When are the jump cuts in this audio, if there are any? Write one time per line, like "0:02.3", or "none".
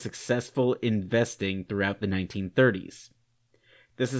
none